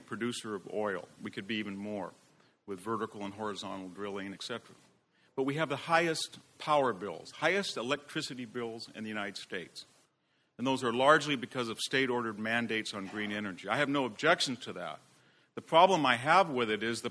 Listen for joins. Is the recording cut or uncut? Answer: cut